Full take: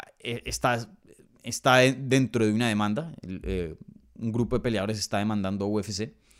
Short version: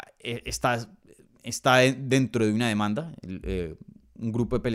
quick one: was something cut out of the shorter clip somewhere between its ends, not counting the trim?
no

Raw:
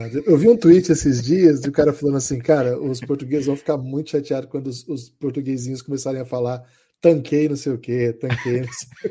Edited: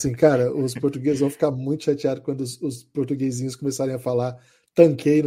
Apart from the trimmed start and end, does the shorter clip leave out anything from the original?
no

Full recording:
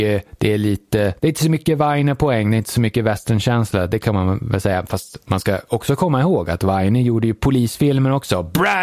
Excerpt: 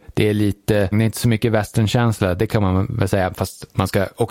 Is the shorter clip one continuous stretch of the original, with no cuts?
no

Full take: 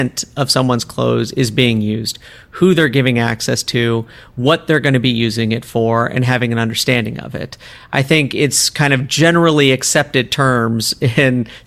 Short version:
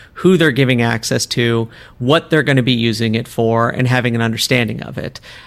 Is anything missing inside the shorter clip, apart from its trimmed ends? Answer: no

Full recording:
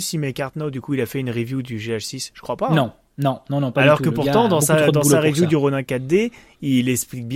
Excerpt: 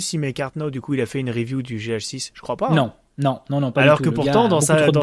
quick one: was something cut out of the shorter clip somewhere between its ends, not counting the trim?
no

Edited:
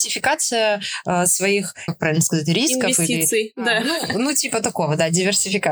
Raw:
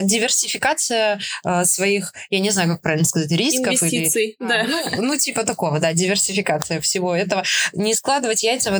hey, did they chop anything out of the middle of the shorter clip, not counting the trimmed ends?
yes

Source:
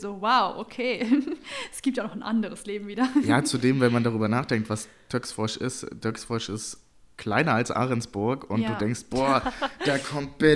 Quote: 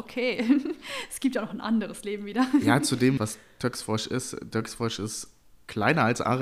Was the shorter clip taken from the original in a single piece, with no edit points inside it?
no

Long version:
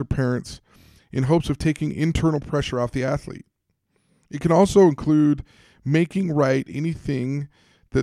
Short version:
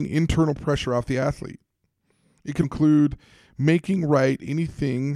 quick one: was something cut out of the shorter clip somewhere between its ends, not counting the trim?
yes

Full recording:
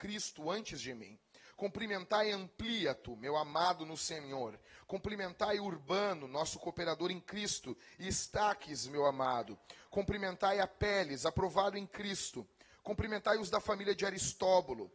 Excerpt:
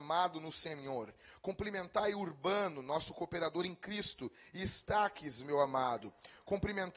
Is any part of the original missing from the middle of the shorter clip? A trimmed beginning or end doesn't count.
no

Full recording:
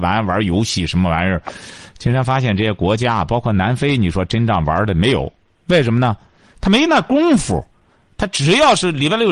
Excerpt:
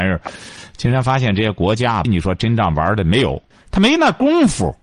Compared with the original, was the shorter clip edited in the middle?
yes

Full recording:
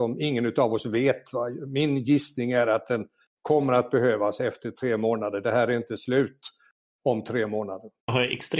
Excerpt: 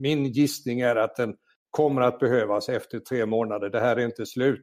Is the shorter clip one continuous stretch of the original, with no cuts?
yes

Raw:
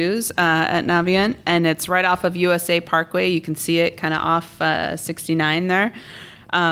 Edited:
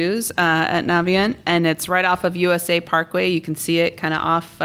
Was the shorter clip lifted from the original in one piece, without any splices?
yes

